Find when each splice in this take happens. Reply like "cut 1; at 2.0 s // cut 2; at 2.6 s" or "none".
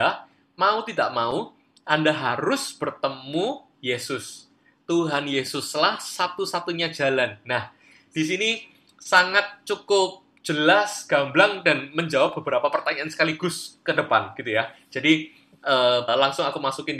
cut 1; at 16.1 s